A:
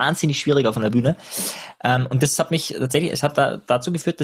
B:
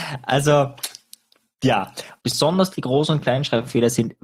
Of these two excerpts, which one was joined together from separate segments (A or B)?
B